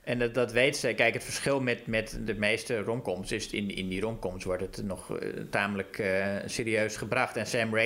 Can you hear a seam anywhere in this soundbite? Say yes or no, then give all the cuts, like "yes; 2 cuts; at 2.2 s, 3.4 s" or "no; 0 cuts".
no; 0 cuts